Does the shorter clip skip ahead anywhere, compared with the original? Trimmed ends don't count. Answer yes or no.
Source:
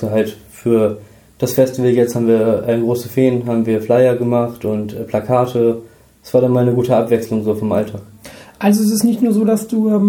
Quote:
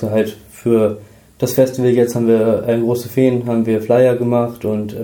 no